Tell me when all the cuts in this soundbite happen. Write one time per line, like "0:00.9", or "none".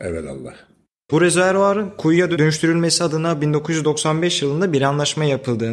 0:01.1